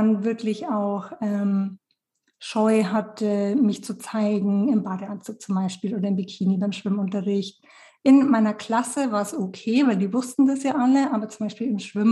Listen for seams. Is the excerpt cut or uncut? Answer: uncut